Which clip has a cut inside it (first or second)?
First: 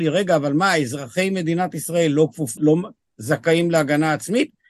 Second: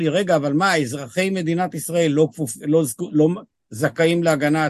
first